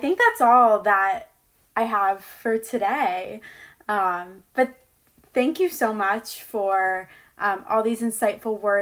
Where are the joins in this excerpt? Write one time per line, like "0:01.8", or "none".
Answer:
none